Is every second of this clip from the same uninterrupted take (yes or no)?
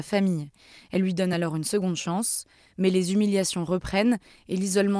yes